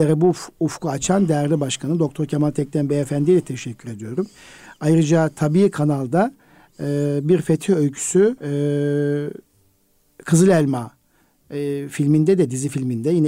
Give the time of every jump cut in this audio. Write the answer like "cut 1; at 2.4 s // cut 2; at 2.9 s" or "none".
cut 1; at 8.4 s